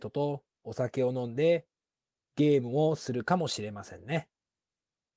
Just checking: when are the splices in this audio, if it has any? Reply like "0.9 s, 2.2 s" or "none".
none